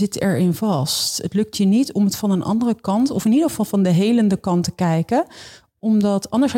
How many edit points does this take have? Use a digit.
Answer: 0